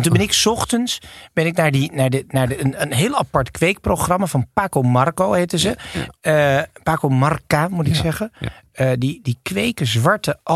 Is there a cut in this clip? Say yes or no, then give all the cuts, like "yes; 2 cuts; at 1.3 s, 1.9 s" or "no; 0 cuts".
no; 0 cuts